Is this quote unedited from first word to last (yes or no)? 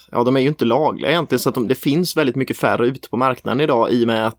no